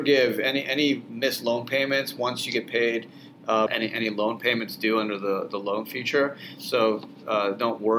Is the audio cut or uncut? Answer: cut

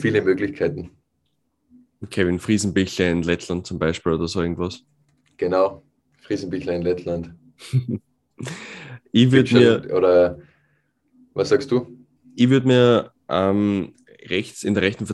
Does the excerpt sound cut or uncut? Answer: uncut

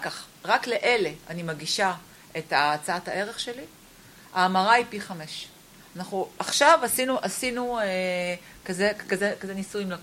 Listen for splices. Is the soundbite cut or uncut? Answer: uncut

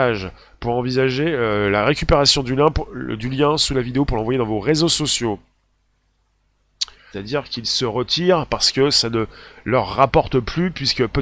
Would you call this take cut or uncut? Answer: cut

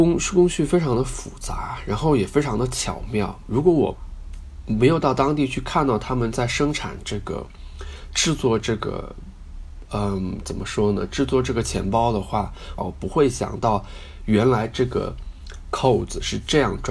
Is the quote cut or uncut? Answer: cut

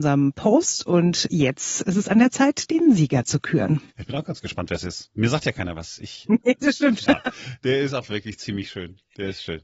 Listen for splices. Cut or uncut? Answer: cut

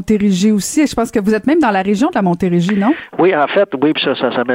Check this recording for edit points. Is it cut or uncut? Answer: uncut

